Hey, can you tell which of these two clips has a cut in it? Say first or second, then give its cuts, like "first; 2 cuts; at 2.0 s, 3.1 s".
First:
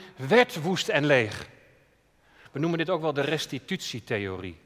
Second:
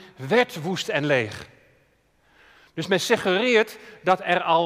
first; 1 cut; at 2.5 s